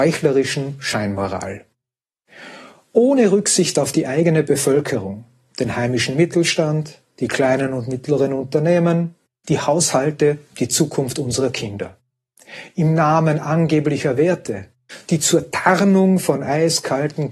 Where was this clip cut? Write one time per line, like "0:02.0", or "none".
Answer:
0:09.3